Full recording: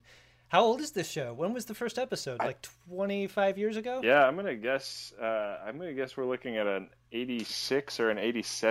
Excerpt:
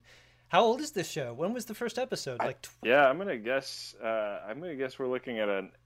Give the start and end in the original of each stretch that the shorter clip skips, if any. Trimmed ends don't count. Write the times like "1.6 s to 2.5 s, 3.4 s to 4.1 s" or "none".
2.8 s to 4.0 s